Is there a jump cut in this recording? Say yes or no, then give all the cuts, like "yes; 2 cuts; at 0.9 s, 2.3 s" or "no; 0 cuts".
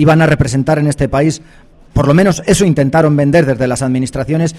no; 0 cuts